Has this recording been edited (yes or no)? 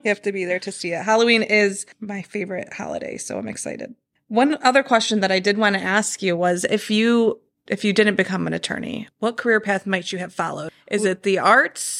no